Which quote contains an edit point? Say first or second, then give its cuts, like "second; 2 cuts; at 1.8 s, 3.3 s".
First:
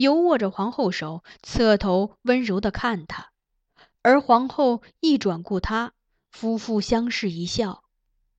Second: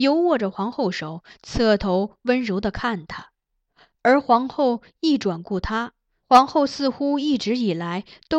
second; 1 cut; at 6.2 s